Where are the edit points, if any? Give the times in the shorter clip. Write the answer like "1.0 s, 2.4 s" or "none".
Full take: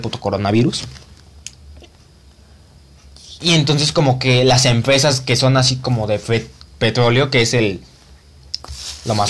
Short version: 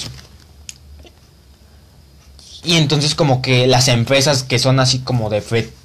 none